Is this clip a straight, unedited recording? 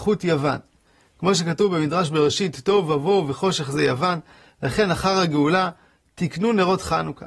yes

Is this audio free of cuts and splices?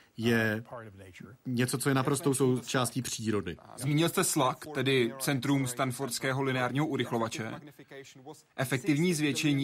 yes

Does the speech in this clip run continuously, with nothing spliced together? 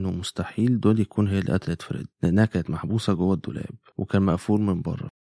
no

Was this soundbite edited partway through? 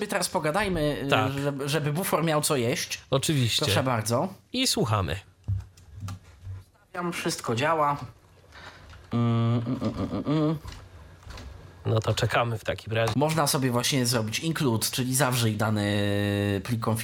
yes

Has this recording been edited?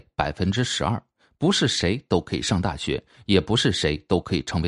no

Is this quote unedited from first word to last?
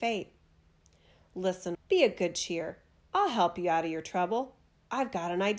no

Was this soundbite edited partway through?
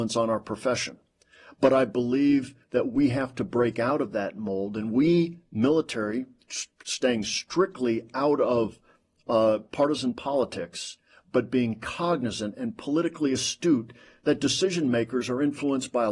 no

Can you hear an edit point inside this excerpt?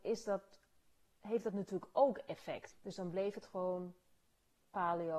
yes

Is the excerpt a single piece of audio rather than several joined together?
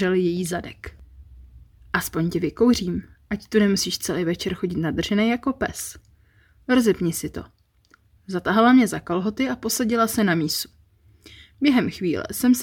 yes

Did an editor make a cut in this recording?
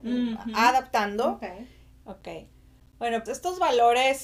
yes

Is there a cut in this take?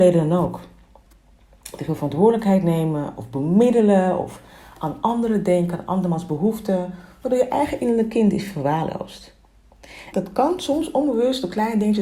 yes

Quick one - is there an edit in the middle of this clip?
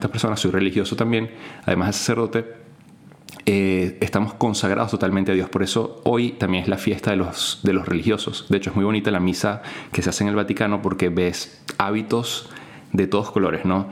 no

